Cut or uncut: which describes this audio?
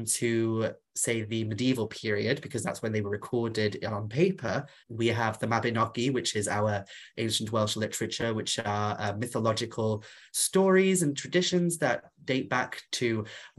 cut